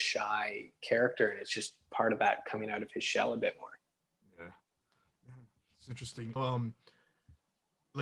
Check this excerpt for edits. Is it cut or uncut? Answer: cut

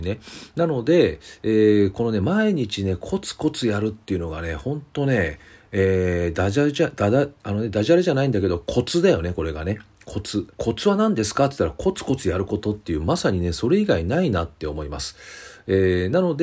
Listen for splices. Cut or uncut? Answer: cut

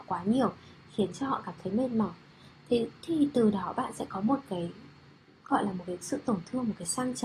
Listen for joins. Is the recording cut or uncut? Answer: uncut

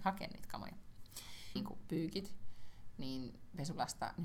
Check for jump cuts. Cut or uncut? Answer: cut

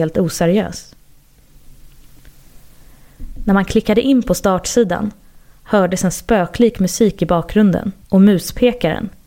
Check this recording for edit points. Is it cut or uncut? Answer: cut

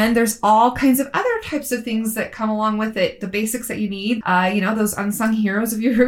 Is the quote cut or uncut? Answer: cut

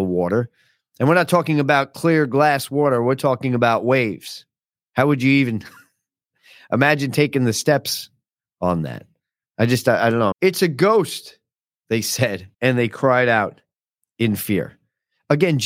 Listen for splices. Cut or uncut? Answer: cut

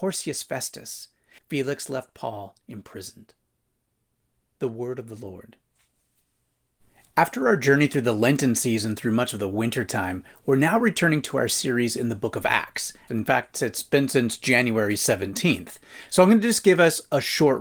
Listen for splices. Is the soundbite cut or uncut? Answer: cut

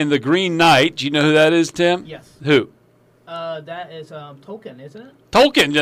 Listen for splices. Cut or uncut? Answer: uncut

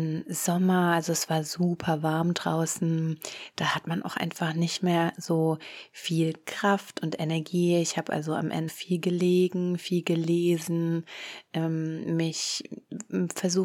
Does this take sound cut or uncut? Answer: cut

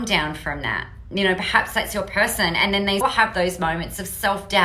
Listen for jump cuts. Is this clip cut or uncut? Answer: cut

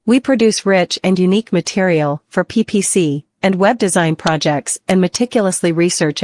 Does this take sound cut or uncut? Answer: cut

